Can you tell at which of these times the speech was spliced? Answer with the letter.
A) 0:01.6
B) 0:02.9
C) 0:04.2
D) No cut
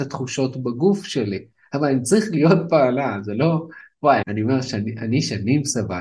C